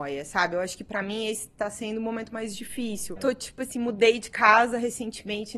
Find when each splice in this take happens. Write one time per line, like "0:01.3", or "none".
0:03.2